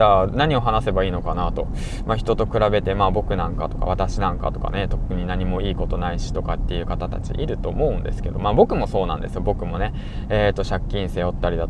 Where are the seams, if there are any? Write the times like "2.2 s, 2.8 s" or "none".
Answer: none